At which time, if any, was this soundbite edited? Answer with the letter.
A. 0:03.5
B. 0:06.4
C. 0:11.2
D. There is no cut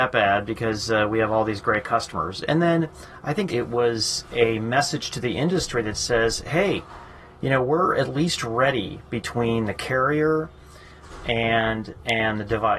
A